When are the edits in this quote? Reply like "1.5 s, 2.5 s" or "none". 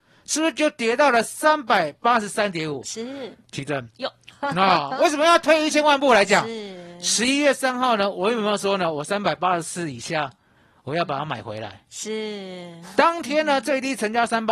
4.3 s